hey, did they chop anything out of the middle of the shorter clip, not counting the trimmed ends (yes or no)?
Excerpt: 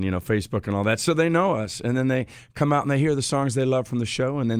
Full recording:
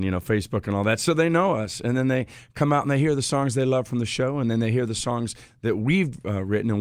no